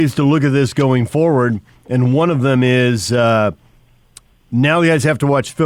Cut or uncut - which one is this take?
uncut